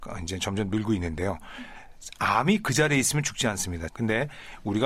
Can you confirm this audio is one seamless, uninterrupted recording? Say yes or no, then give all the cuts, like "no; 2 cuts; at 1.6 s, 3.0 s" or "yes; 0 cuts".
no; 1 cut; at 3.9 s